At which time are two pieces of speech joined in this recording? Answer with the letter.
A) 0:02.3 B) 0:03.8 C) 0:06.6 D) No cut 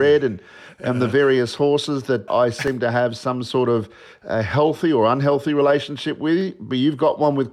A